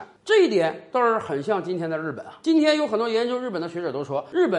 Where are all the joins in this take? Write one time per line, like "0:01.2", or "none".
none